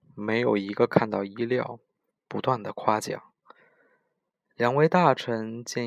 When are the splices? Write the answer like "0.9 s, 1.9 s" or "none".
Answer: 2.1 s